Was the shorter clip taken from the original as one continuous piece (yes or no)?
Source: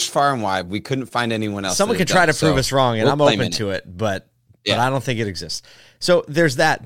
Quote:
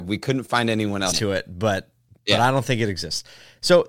no